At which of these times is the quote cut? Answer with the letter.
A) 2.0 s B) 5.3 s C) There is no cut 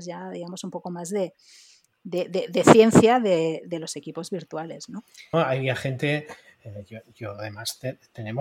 B